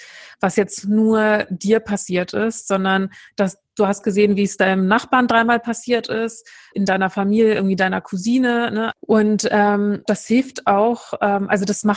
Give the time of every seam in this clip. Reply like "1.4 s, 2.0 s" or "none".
6.7 s, 8.9 s, 10.1 s